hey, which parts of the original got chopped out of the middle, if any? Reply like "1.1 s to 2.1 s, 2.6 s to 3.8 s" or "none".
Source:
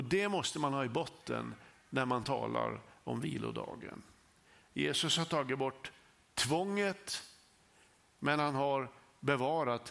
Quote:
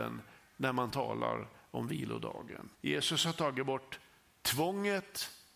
4.1 s to 4.7 s